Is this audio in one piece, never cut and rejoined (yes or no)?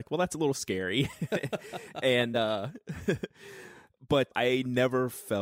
yes